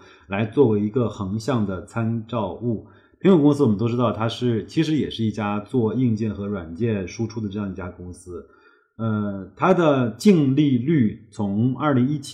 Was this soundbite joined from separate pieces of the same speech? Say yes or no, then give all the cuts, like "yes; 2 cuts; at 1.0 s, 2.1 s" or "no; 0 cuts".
no; 0 cuts